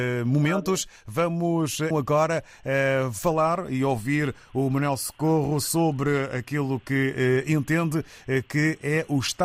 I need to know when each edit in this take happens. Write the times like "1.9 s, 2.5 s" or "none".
1.9 s